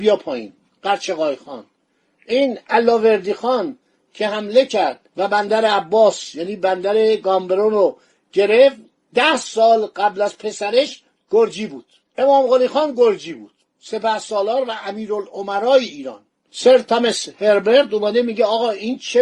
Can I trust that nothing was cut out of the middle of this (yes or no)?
no